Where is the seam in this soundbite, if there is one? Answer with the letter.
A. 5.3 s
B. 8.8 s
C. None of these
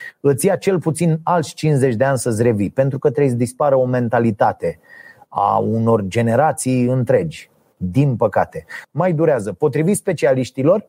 B